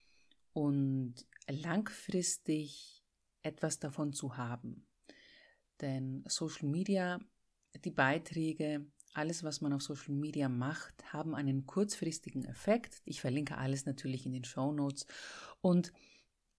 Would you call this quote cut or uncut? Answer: cut